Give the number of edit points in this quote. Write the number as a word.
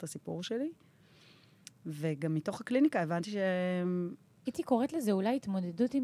one